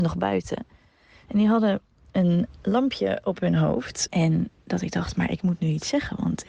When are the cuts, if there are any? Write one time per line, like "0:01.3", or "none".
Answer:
0:04.1